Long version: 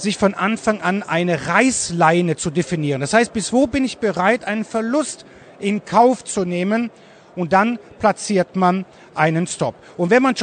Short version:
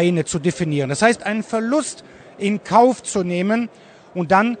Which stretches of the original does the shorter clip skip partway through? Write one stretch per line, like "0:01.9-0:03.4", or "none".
0:03.3-0:04.4